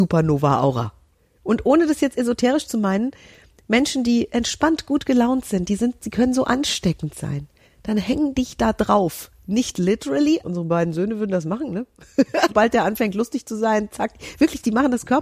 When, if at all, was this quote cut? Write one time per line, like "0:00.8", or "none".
0:07.6
0:10.4
0:12.5